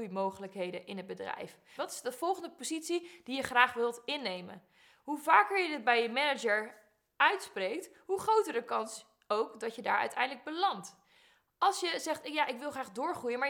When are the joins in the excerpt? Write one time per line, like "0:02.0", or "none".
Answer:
0:01.8